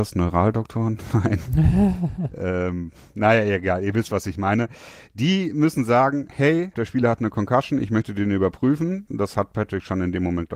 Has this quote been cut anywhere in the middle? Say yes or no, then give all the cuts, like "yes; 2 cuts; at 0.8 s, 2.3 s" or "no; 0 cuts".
yes; 2 cuts; at 6.7 s, 9.1 s